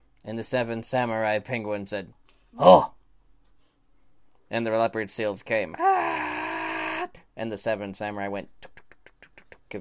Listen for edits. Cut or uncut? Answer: cut